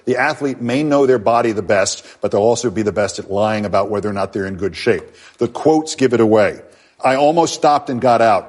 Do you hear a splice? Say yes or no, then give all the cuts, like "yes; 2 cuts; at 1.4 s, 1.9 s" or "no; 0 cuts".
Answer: no; 0 cuts